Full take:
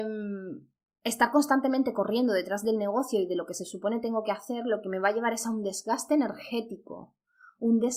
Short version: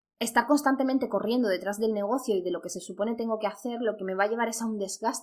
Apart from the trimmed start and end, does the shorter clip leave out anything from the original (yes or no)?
no